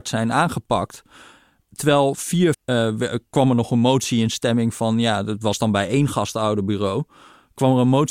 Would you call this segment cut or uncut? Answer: cut